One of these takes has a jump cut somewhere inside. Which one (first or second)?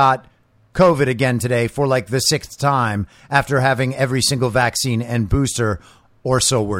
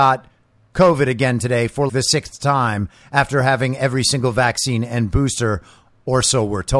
second